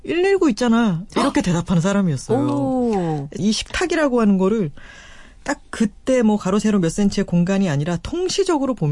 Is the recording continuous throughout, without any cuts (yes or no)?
no